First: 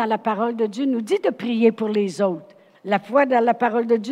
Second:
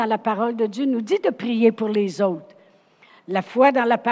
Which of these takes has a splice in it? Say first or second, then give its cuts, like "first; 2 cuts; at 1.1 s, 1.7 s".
first; 1 cut; at 2.7 s